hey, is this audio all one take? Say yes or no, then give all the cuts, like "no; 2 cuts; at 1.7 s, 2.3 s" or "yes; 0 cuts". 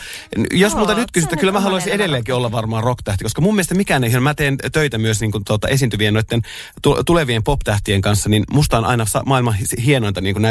yes; 0 cuts